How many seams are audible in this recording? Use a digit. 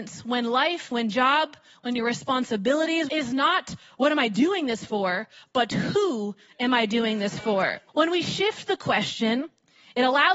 3